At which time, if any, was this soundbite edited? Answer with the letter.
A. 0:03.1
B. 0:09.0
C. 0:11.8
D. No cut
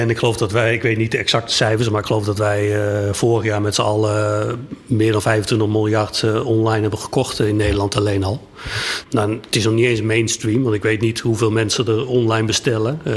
B